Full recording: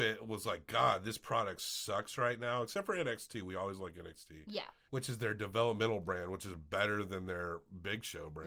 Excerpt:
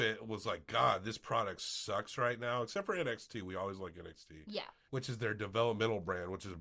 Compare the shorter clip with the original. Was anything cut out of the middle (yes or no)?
no